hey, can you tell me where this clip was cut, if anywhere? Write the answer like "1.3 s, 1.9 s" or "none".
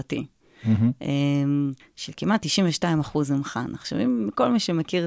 1.8 s